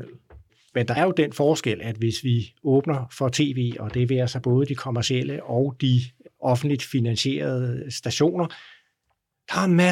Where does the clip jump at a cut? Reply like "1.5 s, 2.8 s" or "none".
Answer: 1.0 s